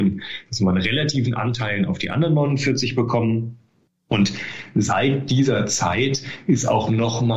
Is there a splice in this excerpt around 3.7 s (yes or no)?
no